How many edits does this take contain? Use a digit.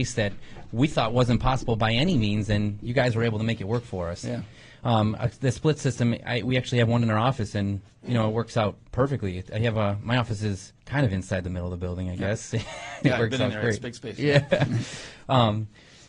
1